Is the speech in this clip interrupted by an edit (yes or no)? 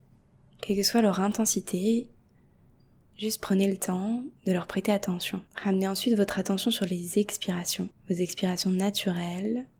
yes